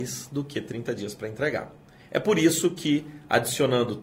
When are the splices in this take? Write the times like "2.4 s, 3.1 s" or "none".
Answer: none